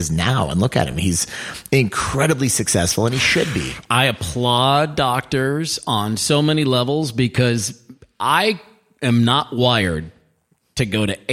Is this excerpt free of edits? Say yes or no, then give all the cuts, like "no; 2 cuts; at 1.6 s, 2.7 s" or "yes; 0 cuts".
yes; 0 cuts